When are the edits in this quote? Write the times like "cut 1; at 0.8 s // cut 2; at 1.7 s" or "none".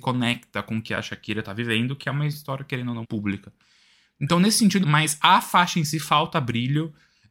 cut 1; at 3.0 s // cut 2; at 4.8 s